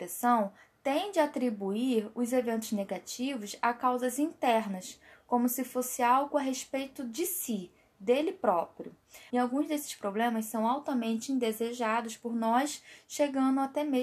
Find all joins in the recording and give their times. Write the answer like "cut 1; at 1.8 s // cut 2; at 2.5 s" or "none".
cut 1; at 9.3 s